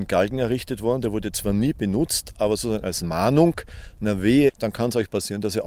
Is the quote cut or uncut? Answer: cut